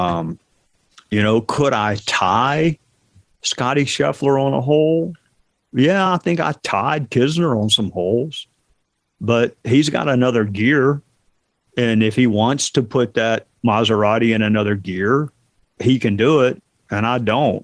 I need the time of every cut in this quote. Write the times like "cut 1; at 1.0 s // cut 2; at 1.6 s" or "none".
none